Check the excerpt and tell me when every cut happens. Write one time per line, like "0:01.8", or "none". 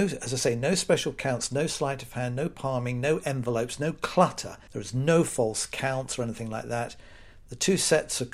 0:04.7